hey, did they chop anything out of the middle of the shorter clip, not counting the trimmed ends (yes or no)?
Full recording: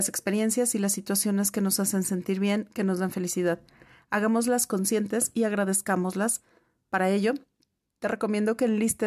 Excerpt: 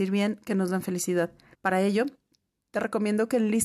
yes